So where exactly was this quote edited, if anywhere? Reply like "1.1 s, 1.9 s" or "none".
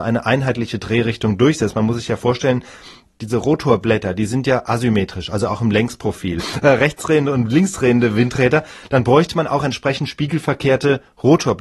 6.4 s